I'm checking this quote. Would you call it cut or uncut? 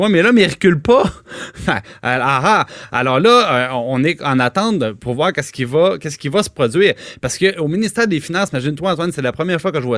uncut